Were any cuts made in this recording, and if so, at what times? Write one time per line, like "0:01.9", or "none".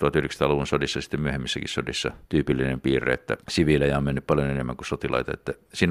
0:02.3
0:03.4

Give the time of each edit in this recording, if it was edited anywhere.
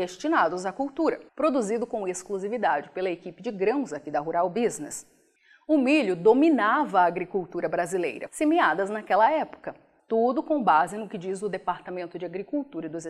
0:01.3
0:08.3
0:10.0

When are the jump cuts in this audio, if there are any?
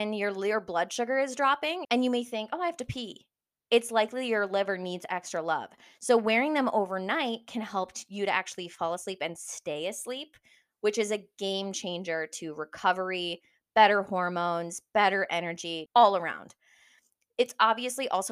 0:01.8
0:15.9

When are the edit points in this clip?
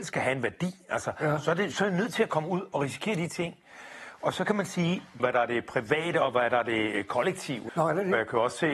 0:05.2
0:07.7

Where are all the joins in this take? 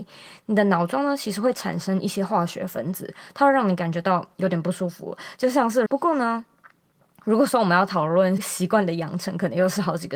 0:05.9
0:08.4

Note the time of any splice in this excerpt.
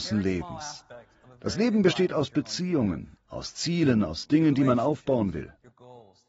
none

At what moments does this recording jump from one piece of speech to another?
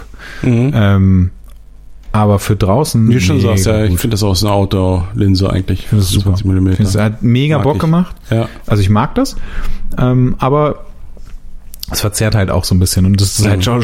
0:08.7

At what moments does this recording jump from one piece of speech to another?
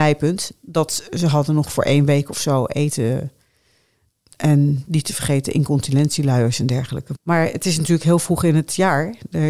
0:07.1

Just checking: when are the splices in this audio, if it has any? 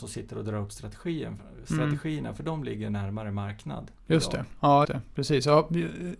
0:04.8

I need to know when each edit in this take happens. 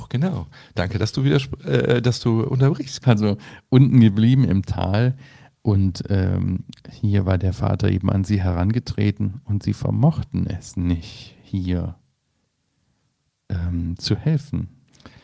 0:03.0

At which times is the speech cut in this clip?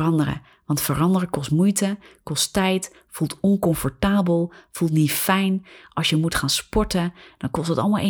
none

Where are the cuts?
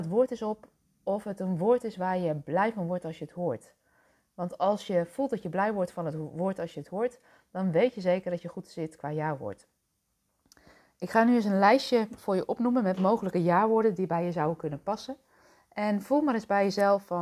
none

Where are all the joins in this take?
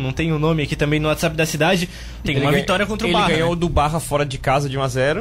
0:02.2

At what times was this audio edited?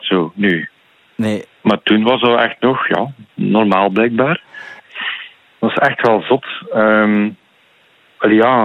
0:04.8

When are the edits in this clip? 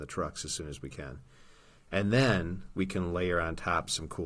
none

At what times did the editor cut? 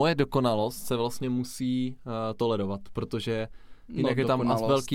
none

